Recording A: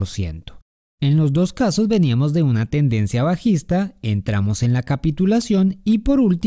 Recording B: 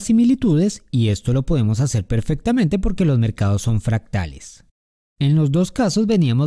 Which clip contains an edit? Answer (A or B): A